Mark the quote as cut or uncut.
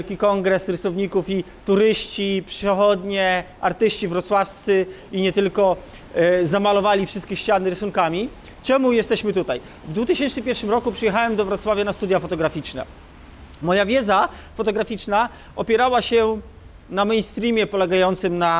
uncut